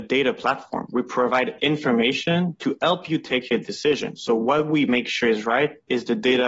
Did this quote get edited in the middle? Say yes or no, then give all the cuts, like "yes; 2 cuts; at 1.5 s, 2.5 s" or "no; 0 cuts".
no; 0 cuts